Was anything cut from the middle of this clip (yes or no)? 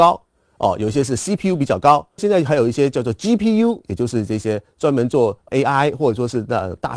yes